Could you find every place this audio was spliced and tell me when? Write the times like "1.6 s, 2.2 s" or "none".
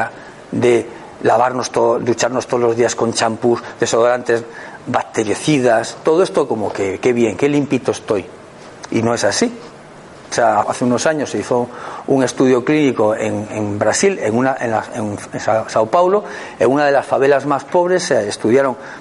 10.6 s